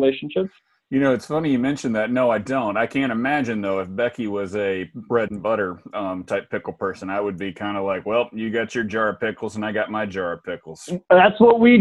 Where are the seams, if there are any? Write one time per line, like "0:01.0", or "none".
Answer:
none